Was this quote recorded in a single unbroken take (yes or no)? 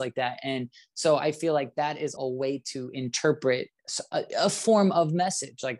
no